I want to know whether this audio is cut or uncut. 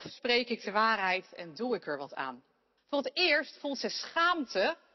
cut